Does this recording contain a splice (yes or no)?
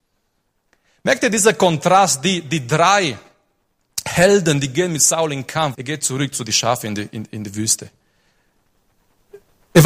yes